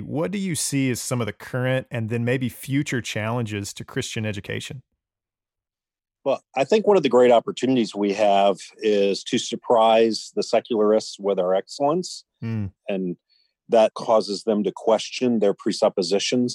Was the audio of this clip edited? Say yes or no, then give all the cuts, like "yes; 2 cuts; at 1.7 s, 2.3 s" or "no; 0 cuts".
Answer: yes; 2 cuts; at 12.8 s, 13.9 s